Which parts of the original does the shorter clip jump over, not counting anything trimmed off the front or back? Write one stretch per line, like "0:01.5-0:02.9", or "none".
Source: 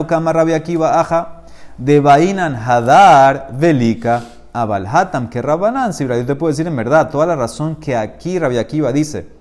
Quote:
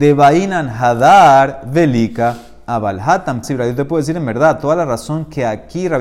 0:05.3-0:05.9